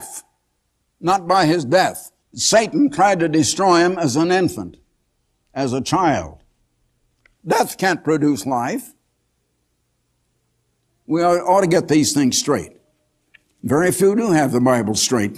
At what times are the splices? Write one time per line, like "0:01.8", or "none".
0:02.2
0:07.4

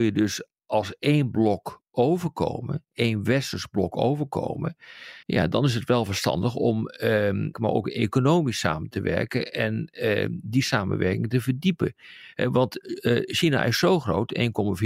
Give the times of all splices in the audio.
0:05.2
0:07.5

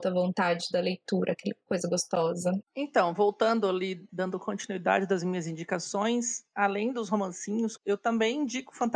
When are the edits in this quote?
0:02.6
0:04.1
0:07.8

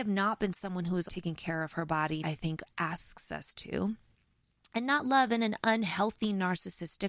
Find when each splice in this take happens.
0:01.1
0:02.2

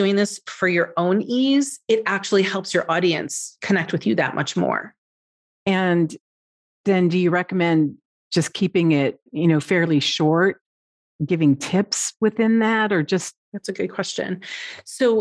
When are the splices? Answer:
0:05.5
0:09.3
0:13.4

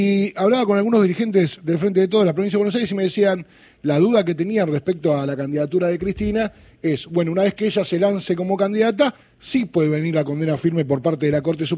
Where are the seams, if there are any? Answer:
none

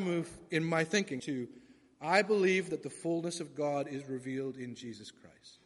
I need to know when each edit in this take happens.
0:01.2

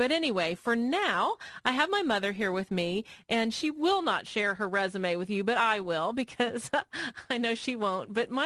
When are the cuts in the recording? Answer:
none

